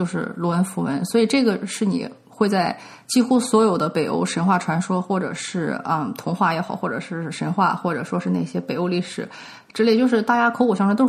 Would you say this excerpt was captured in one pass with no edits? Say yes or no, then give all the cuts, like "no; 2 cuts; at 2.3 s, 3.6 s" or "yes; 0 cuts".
yes; 0 cuts